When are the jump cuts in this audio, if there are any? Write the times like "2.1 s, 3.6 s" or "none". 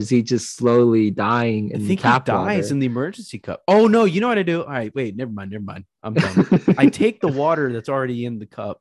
none